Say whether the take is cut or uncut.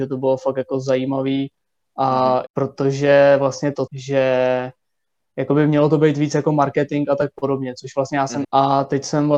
cut